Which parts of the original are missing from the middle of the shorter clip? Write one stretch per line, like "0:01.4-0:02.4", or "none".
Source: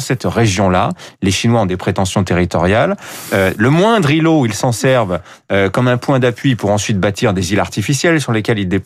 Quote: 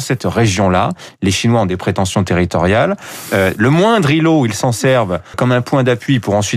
0:05.3-0:05.7